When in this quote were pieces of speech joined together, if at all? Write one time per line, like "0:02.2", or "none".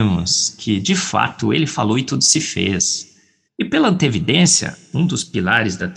0:03.5